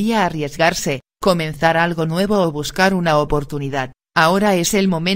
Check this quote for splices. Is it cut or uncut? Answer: uncut